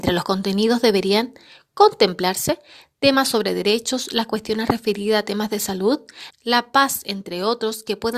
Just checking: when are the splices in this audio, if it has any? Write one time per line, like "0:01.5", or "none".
0:06.3